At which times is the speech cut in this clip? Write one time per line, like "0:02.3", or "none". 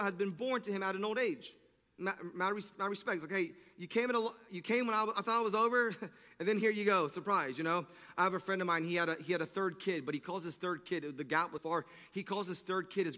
0:11.6

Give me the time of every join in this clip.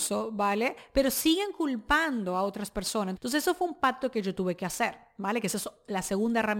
0:03.2

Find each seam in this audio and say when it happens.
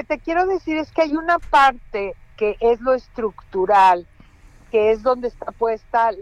none

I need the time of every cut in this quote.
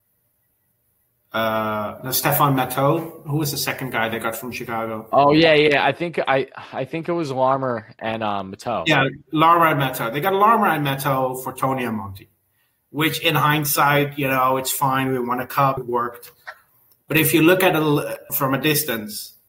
0:15.8
0:18.3

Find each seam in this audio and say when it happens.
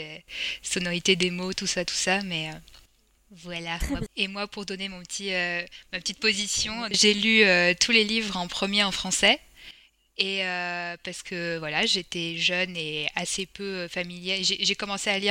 0:04.1
0:06.9

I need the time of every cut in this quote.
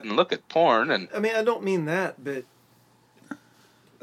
0:01.1

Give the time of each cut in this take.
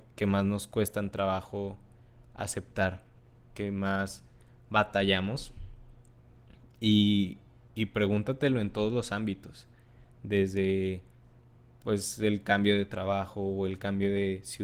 none

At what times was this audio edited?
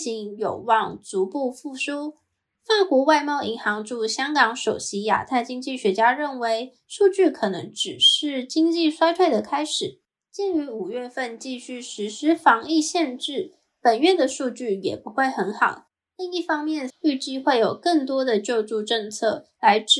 0:16.9

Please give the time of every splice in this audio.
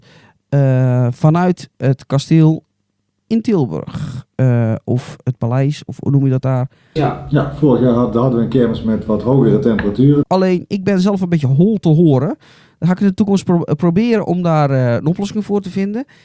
0:07.0
0:10.2

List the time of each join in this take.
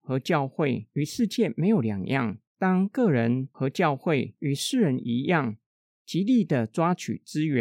0:02.5
0:05.9

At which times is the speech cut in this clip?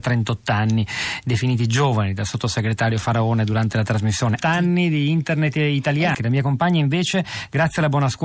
0:04.4
0:06.1

